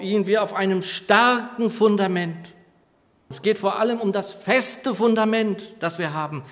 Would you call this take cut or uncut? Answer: cut